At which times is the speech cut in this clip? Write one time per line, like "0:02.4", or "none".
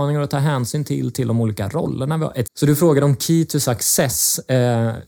0:02.5